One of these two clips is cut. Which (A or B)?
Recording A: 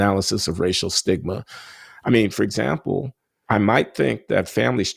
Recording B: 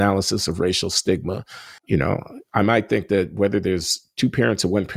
B